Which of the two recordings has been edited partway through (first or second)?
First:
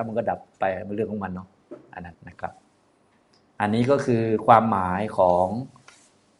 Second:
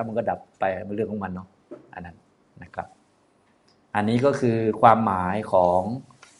first